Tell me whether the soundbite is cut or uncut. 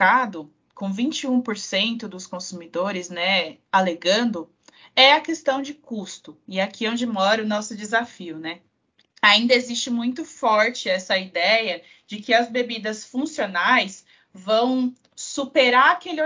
uncut